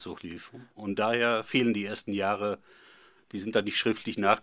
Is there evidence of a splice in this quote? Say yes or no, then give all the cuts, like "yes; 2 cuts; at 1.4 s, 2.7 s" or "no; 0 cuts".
no; 0 cuts